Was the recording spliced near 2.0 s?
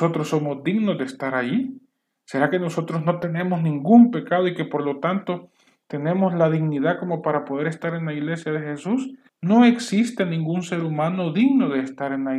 no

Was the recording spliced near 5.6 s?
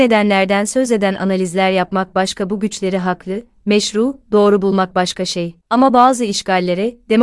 no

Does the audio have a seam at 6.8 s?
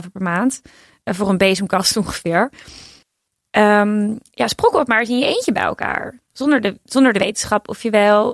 no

